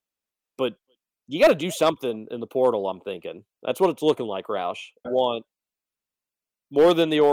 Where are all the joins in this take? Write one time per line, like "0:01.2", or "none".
0:05.0